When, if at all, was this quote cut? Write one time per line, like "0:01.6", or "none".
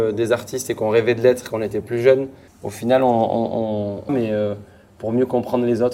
0:02.5
0:04.1

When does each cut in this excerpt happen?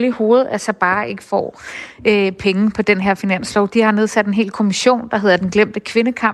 0:03.7

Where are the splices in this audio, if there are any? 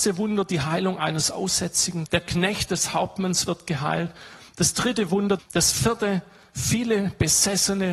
0:02.1
0:05.4

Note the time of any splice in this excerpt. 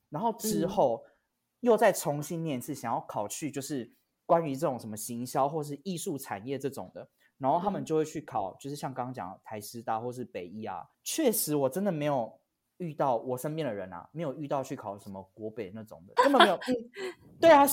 0:16.2

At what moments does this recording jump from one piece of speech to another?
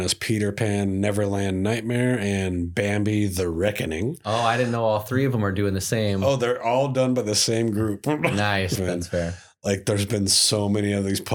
0:08.7

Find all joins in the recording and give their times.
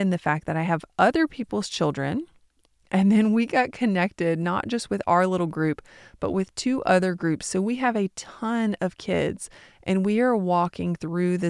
none

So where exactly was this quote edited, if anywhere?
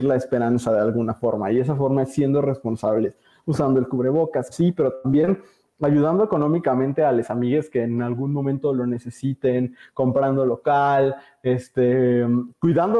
0:04.5

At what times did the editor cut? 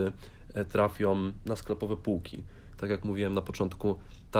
0:02.8

